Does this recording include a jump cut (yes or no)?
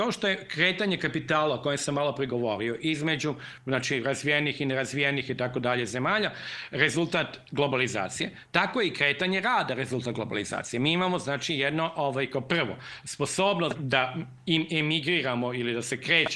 yes